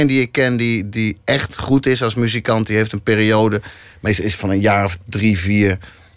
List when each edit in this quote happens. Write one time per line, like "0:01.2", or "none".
none